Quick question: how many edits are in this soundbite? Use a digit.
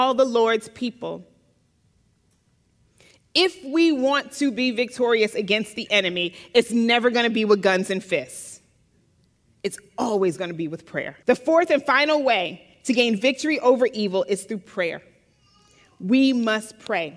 1